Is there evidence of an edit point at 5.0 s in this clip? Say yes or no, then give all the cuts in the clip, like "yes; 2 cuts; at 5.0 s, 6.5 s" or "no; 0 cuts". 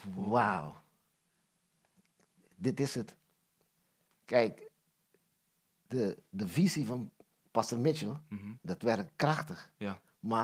no; 0 cuts